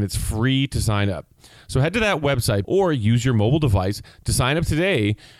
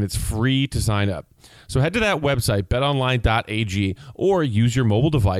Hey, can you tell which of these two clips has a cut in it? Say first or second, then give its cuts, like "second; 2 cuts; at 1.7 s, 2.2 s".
first; 1 cut; at 2.6 s